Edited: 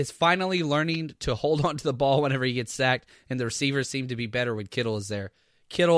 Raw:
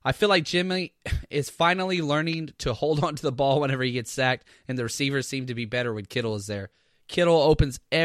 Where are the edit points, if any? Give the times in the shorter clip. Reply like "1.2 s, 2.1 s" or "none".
none